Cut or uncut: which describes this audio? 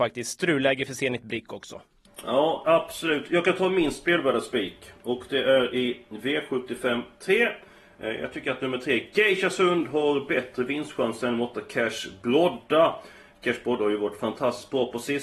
cut